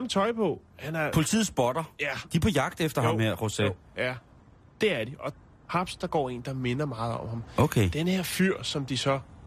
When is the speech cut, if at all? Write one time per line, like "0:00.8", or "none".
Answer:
none